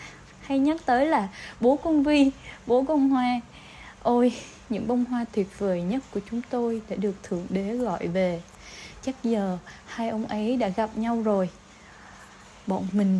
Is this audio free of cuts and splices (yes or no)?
yes